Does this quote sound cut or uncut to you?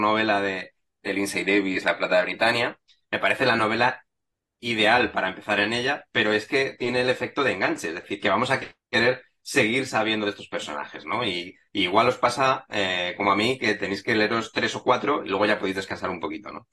uncut